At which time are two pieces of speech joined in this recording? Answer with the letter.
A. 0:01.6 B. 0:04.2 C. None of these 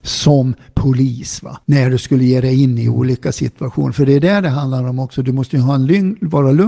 A